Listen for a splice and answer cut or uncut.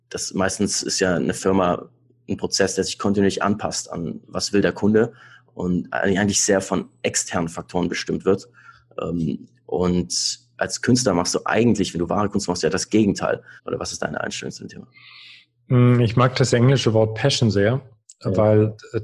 cut